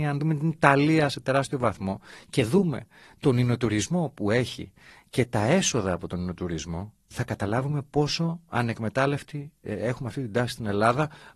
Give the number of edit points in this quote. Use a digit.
1